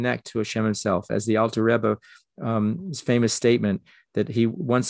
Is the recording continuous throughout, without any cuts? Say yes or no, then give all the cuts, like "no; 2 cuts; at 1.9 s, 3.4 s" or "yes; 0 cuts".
yes; 0 cuts